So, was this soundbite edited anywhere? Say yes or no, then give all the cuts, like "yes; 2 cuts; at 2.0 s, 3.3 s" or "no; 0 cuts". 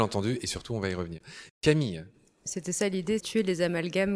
yes; 1 cut; at 3.2 s